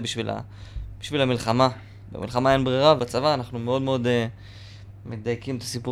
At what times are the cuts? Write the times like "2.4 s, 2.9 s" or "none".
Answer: 3.0 s